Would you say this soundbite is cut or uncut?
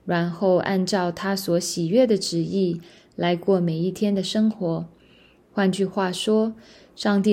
cut